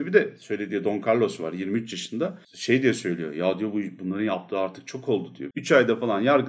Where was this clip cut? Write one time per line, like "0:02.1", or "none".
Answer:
0:02.4
0:05.5